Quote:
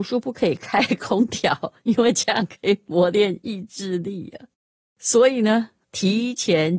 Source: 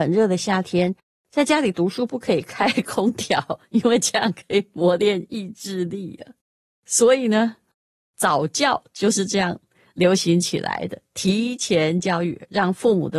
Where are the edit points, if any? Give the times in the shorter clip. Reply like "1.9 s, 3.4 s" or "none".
5.8 s